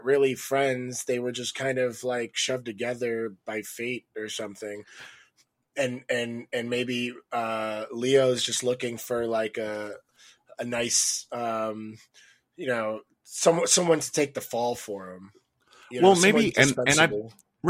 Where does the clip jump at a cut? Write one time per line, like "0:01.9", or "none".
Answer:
none